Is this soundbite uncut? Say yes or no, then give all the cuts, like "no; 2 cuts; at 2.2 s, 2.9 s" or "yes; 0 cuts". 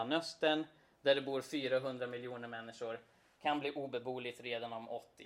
yes; 0 cuts